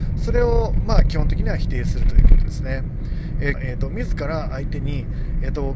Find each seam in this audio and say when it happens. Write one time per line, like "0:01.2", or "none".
0:03.5